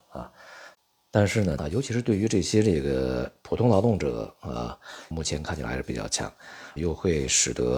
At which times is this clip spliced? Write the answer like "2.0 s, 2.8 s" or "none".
1.6 s, 5.1 s, 6.8 s